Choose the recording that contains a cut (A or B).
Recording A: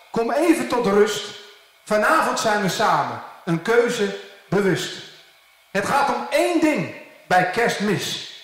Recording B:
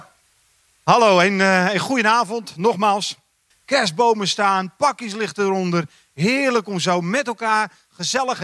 B